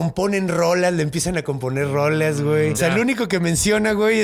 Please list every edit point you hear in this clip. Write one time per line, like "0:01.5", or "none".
0:02.7